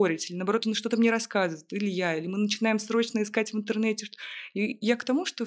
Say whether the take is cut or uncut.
uncut